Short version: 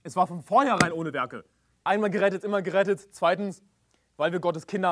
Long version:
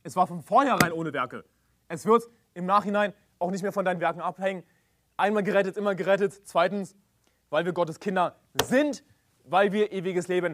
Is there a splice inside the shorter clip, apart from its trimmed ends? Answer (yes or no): yes